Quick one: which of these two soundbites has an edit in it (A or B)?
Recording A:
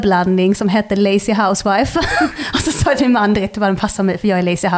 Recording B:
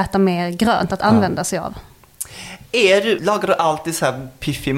B